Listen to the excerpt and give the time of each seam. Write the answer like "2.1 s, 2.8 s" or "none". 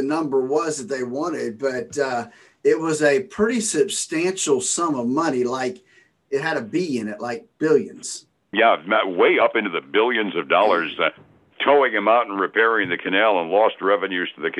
8.5 s